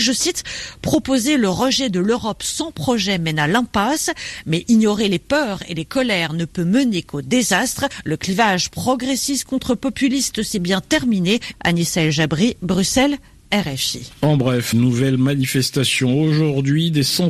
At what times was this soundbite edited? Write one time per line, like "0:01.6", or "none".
0:11.5
0:14.7